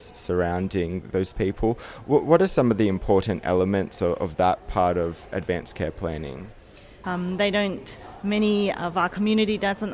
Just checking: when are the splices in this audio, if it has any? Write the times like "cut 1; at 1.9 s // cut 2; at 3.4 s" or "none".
cut 1; at 7.0 s